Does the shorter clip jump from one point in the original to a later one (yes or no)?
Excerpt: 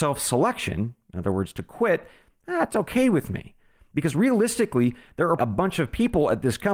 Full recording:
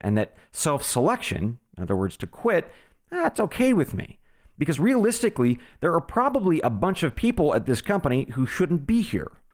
yes